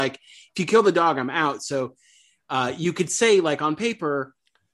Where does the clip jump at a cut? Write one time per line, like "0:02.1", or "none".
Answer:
none

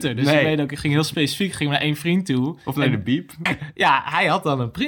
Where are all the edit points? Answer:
0:03.5

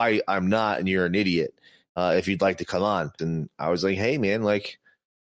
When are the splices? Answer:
0:03.2

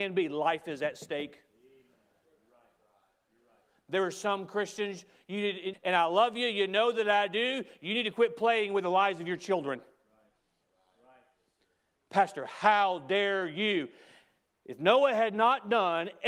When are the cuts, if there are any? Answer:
0:05.7

